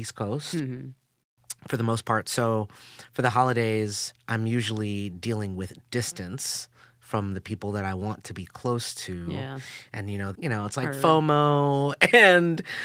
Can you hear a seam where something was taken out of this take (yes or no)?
yes